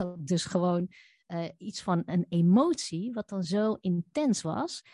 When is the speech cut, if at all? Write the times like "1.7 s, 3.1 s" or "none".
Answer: none